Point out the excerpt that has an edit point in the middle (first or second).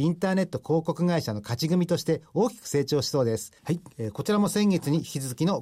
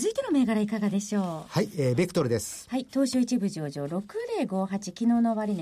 first